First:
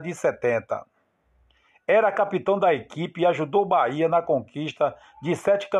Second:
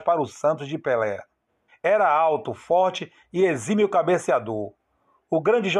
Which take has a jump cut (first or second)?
second